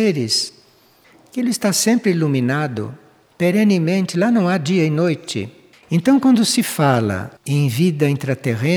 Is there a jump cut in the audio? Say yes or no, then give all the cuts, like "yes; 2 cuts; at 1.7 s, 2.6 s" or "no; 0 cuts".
yes; 2 cuts; at 5.7 s, 7.4 s